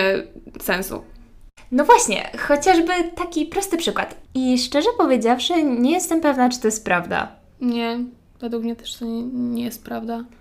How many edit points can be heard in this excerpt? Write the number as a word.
one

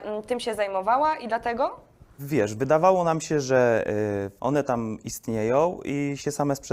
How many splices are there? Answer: two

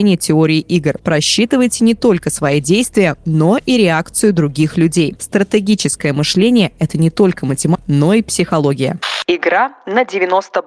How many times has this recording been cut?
three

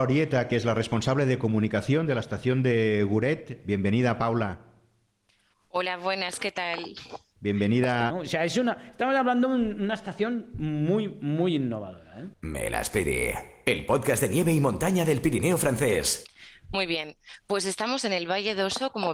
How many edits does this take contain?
two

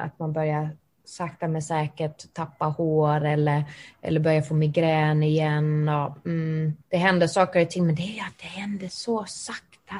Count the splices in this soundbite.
one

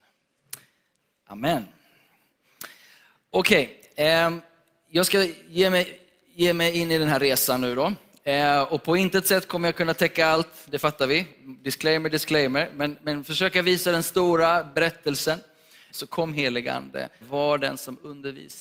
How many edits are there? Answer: two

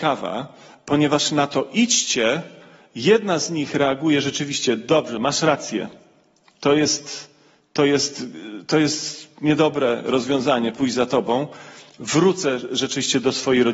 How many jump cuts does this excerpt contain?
zero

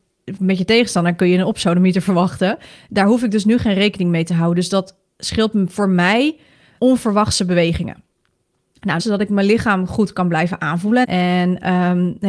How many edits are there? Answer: two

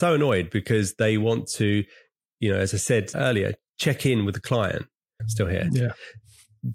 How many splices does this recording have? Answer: two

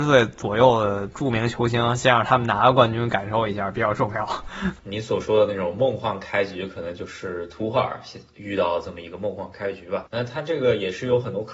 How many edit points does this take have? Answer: one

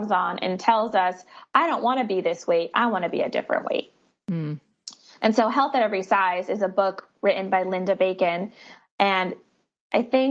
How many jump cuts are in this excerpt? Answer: zero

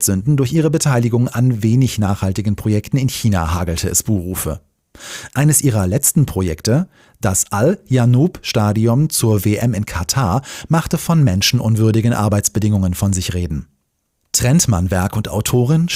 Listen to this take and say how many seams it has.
zero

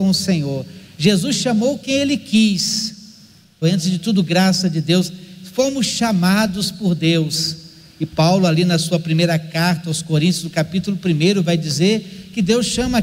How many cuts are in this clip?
one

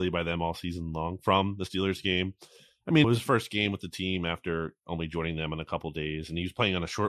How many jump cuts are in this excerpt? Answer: one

